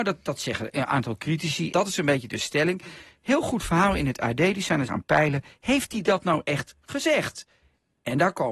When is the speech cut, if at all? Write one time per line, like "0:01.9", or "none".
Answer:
0:01.7
0:04.9